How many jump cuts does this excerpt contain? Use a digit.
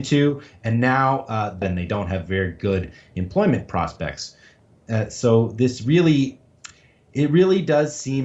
1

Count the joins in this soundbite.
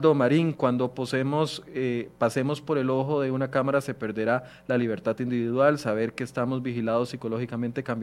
0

